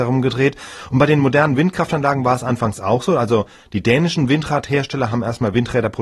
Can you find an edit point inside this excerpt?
no; 0 cuts

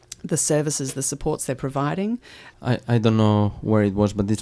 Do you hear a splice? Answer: yes; 1 cut; at 2.5 s

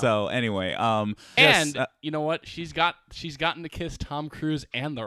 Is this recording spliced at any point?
yes; 1 cut; at 1.4 s

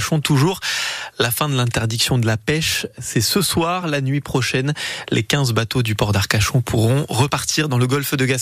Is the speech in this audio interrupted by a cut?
no; 0 cuts

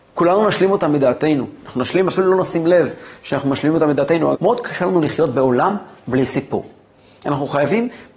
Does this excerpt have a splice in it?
yes; 1 cut; at 4.3 s

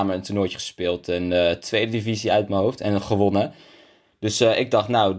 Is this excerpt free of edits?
yes; 0 cuts

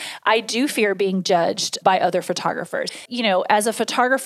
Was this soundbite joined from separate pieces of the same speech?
yes; 1 cut; at 3.1 s

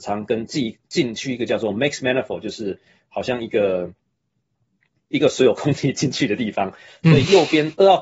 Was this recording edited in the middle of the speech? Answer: no; 0 cuts

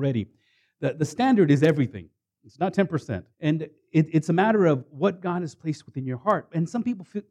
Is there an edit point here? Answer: yes; 1 cut; at 3.3 s

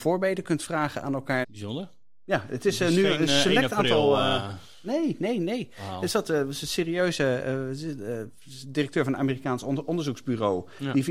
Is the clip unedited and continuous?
no; 1 cut; at 1.4 s

